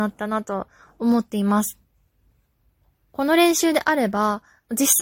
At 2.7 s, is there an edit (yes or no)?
no